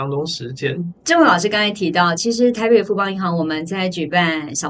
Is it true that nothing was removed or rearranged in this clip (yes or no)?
no